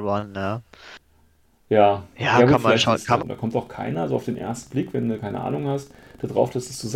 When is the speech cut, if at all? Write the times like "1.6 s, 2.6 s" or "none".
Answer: 3.2 s